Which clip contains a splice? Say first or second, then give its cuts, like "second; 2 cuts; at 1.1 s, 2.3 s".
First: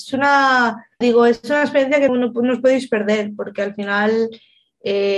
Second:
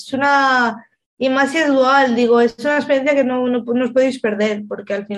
first; 2 cuts; at 1.0 s, 2.1 s